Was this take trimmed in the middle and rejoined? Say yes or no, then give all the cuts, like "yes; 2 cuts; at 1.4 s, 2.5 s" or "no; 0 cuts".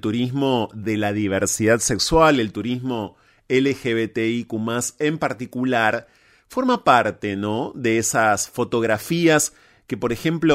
no; 0 cuts